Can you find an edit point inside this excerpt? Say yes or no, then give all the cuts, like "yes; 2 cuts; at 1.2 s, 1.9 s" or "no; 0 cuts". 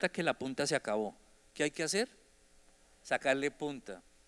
no; 0 cuts